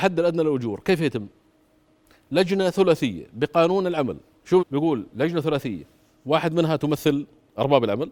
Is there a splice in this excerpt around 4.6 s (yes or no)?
yes